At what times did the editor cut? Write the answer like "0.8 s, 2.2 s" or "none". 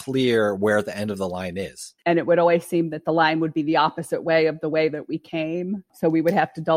2.0 s